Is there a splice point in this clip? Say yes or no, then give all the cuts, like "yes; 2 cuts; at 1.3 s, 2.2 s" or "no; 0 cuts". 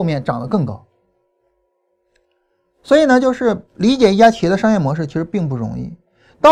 no; 0 cuts